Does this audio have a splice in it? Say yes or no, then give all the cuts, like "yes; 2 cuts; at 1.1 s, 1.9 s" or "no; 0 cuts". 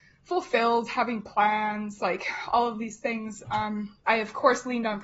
yes; 1 cut; at 4.1 s